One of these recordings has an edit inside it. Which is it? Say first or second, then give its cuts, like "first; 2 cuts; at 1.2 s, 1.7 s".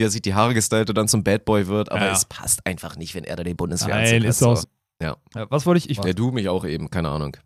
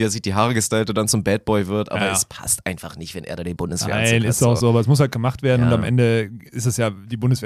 first; 2 cuts; at 4.6 s, 6.0 s